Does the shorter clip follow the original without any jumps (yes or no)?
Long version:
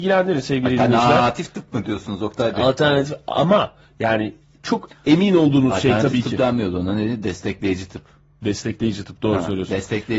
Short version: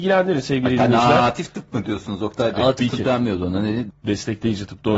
no